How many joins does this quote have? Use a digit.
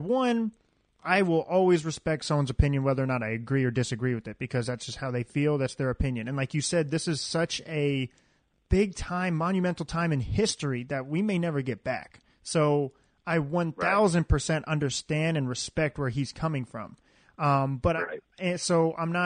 0